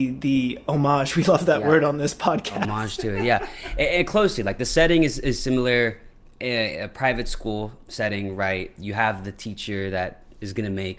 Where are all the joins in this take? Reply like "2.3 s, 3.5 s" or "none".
none